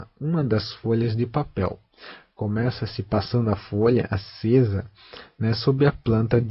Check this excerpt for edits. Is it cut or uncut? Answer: uncut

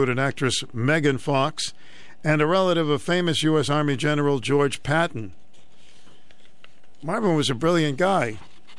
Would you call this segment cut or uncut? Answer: uncut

